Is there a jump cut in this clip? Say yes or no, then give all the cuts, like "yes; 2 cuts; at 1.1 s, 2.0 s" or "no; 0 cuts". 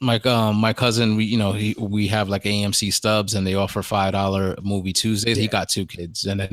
yes; 1 cut; at 5.4 s